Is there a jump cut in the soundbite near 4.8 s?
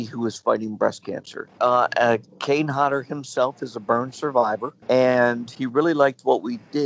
yes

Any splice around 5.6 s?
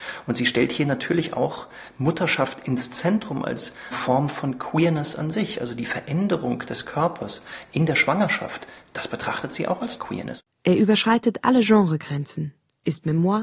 no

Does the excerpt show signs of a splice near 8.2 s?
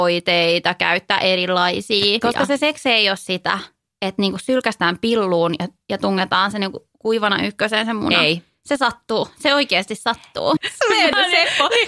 no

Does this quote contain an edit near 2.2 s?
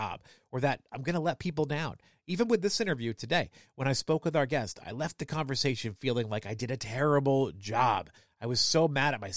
no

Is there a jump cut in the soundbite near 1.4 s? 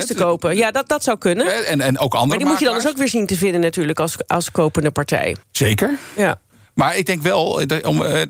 no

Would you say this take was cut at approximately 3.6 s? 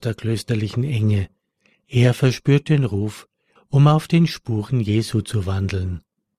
yes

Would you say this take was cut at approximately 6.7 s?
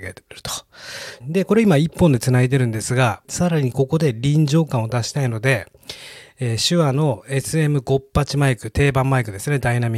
no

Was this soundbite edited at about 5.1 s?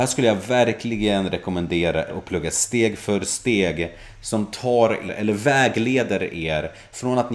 yes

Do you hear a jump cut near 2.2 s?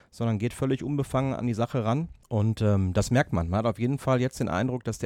yes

